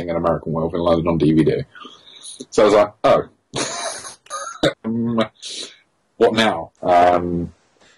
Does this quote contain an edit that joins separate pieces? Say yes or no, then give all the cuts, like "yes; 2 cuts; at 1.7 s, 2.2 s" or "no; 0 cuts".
yes; 2 cuts; at 4.7 s, 6.8 s